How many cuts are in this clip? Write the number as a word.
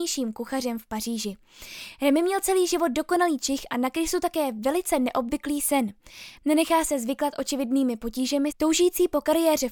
two